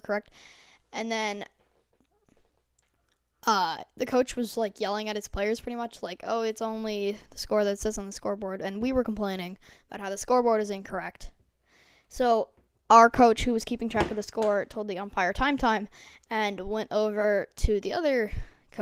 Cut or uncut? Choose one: uncut